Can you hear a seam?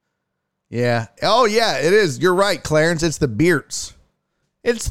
no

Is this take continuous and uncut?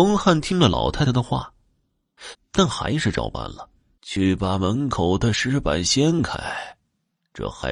no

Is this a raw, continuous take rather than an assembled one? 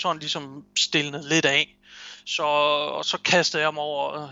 yes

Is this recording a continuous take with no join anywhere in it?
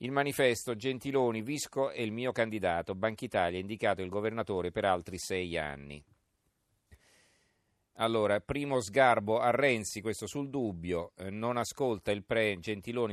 no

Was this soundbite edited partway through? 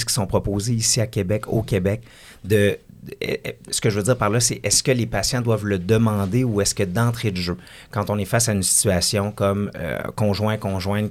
no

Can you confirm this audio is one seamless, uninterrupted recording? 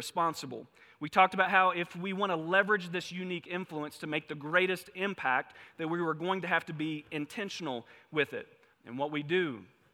no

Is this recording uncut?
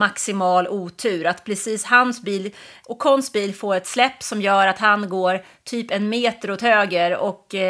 yes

